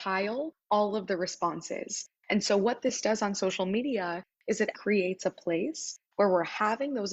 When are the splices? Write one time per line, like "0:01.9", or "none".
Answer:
0:04.7